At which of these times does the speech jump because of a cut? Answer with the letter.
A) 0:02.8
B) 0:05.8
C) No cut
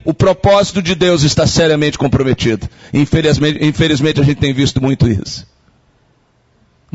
C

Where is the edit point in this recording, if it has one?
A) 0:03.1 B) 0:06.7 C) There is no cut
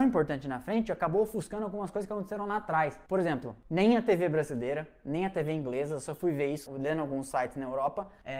B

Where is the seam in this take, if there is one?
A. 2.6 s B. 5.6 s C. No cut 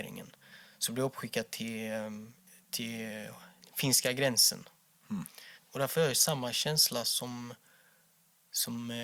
B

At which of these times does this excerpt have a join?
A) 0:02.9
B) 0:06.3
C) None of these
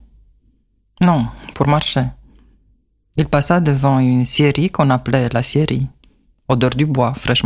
C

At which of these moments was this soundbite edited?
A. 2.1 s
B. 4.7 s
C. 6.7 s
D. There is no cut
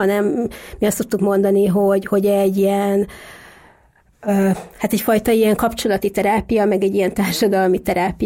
D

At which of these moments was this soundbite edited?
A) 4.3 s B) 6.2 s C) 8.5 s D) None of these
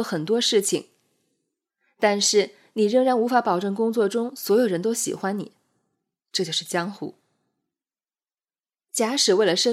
B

